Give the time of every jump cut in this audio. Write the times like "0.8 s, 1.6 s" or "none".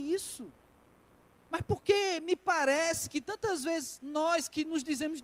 1.3 s